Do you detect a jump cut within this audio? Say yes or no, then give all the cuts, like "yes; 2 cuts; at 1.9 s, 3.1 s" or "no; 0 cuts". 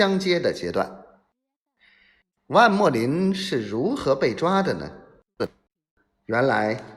no; 0 cuts